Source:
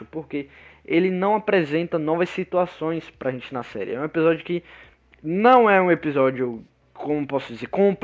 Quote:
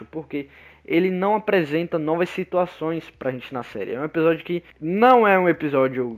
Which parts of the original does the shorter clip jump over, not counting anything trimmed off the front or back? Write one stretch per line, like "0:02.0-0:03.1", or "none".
0:04.7-0:05.1